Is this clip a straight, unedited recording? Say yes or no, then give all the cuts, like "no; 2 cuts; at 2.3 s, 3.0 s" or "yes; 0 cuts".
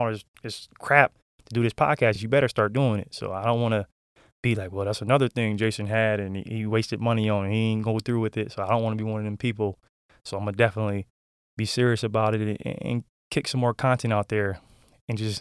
yes; 0 cuts